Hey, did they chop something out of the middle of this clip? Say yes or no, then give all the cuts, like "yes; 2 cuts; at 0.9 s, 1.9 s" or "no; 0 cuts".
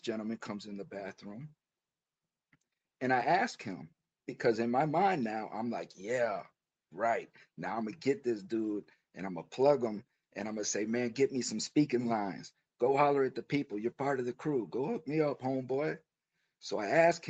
no; 0 cuts